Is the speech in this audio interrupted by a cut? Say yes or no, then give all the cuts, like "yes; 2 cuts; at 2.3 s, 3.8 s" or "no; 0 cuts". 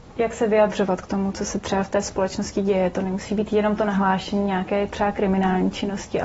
no; 0 cuts